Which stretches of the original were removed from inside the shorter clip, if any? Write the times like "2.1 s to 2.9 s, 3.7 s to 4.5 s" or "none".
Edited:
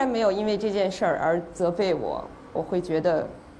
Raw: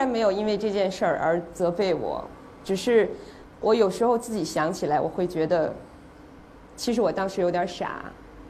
2.6 s to 5.0 s